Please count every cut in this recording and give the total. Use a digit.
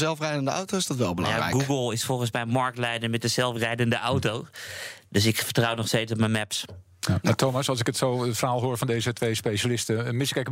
0